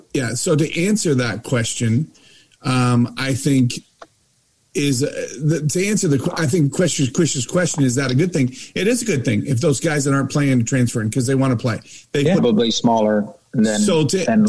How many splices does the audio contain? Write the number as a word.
one